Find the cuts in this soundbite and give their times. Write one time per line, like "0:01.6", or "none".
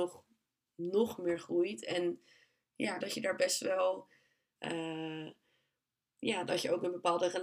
0:03.0
0:04.6